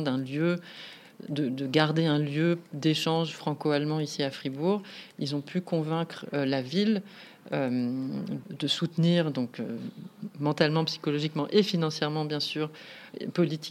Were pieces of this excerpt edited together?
yes; 1 cut; at 8.4 s

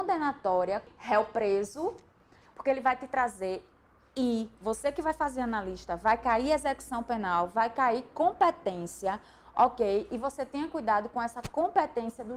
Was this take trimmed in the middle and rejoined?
yes; 1 cut; at 2.4 s

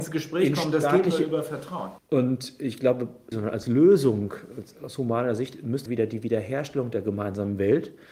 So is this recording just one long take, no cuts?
no; 3 cuts; at 2.0 s, 3.3 s, 5.9 s

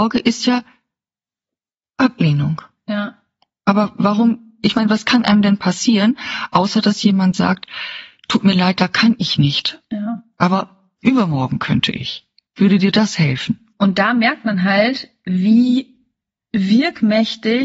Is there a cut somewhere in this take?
no; 0 cuts

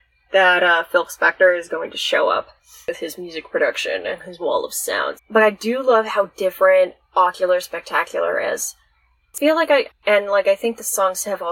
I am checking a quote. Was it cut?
yes; 2 cuts; at 5.2 s, 9.9 s

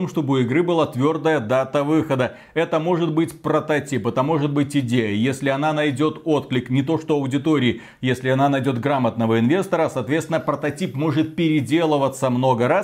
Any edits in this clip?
no; 0 cuts

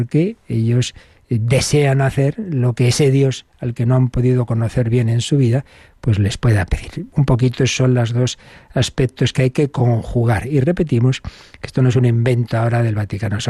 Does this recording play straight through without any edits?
yes; 0 cuts

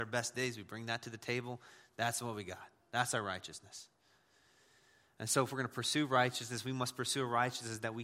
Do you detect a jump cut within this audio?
no; 0 cuts

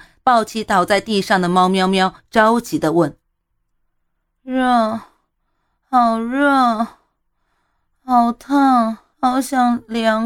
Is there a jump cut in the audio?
yes; 1 cut; at 9.1 s

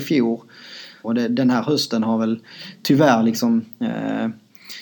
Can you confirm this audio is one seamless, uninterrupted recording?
no; 1 cut; at 1.0 s

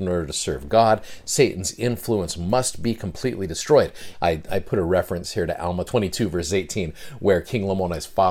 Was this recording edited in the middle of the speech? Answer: yes; 1 cut; at 4.1 s

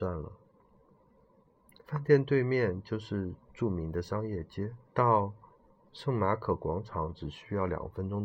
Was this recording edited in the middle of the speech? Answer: yes; 2 cuts; at 1.8 s, 4.9 s

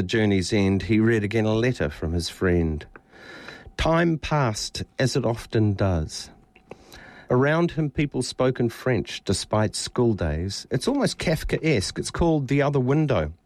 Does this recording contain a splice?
yes; 1 cut; at 10.7 s

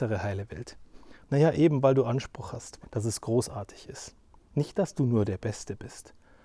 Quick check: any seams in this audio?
yes; 2 cuts; at 1.2 s, 2.8 s

